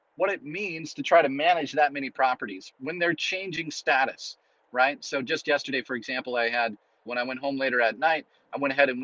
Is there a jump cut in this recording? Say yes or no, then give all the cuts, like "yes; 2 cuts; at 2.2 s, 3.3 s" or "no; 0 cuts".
yes; 1 cut; at 7.1 s